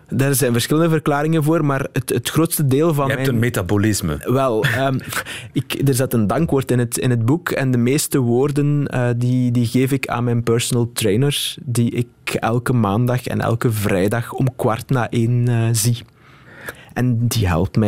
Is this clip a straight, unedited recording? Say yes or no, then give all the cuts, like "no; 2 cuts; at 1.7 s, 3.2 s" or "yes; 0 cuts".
yes; 0 cuts